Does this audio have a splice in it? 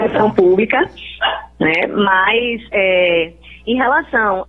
no; 0 cuts

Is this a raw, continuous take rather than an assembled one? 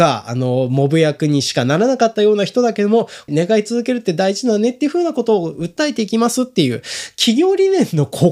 no; 1 cut; at 3.3 s

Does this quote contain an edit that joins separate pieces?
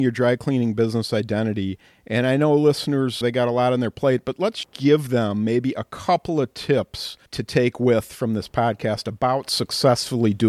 yes; 2 cuts; at 3.2 s, 7.3 s

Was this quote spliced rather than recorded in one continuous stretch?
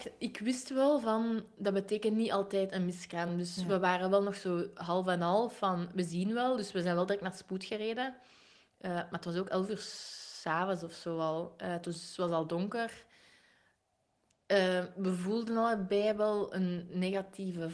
no; 0 cuts

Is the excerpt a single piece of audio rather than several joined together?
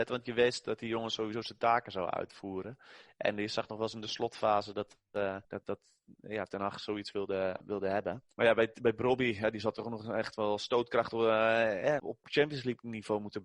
no; 2 cuts; at 5.4 s, 12.0 s

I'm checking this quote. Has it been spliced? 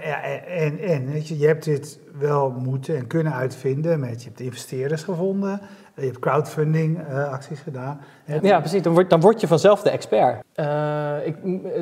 yes; 2 cuts; at 8.4 s, 10.4 s

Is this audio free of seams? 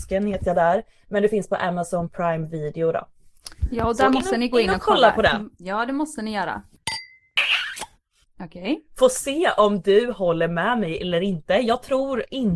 no; 1 cut; at 8.2 s

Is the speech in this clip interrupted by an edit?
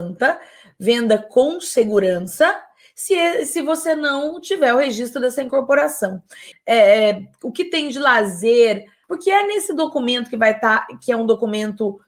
yes; 2 cuts; at 6.5 s, 9.0 s

